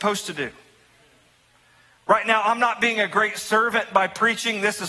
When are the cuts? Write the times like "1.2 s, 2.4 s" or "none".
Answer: none